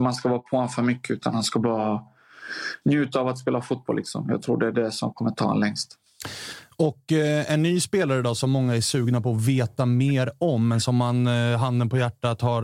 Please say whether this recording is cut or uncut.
uncut